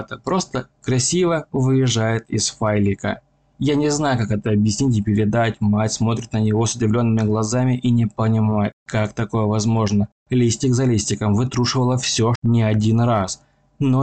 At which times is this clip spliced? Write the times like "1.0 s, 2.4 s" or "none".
10.2 s, 12.3 s